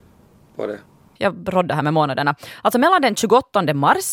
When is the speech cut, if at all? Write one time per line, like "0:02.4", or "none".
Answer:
0:01.2

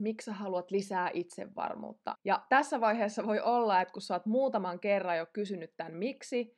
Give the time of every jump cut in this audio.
0:02.2

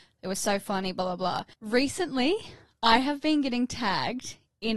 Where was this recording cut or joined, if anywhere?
0:01.5

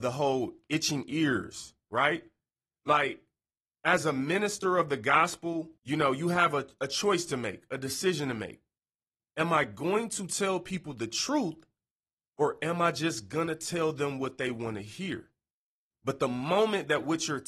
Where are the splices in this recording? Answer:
0:05.8
0:15.9

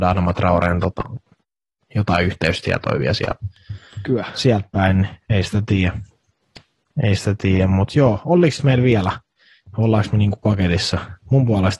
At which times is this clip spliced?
none

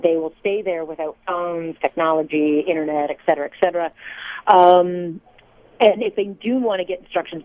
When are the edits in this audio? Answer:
none

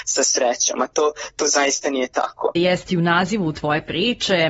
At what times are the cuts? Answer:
0:02.6

